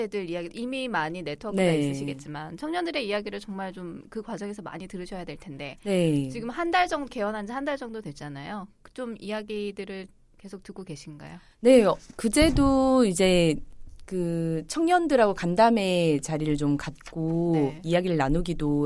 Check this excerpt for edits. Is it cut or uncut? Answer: uncut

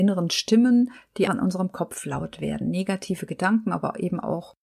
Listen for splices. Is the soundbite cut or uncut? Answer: cut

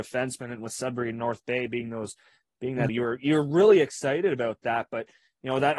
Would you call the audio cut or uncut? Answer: cut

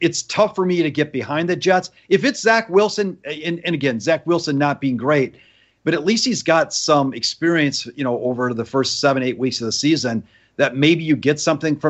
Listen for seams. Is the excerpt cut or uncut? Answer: uncut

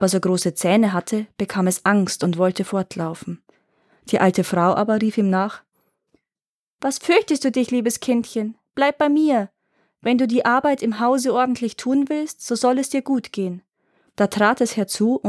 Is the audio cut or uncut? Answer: cut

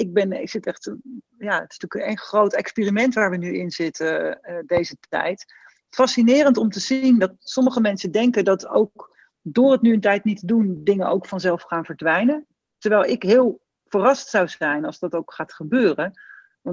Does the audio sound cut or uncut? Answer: uncut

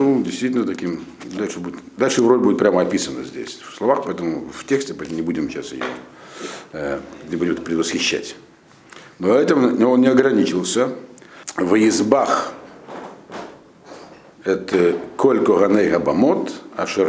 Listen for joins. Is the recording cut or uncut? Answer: uncut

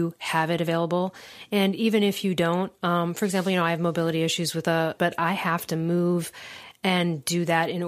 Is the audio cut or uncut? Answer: cut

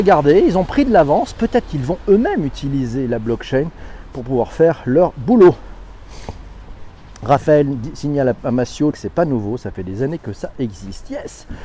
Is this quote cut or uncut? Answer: cut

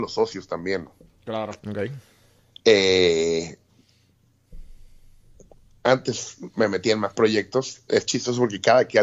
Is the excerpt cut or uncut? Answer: cut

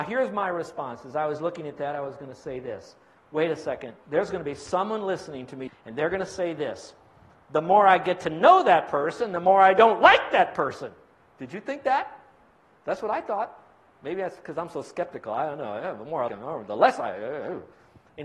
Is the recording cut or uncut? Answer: cut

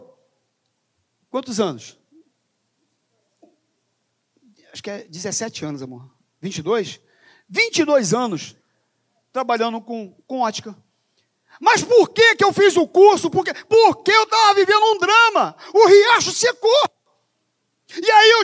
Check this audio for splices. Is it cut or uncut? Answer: uncut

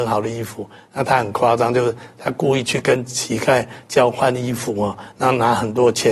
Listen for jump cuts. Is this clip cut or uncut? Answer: uncut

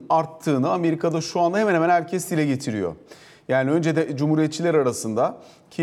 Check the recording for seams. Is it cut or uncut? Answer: uncut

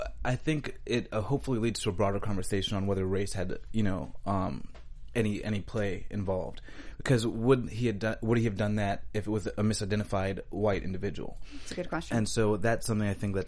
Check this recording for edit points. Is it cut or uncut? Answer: uncut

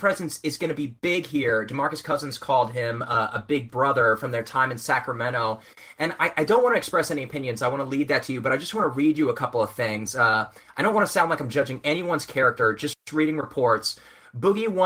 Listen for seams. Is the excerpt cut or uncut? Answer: uncut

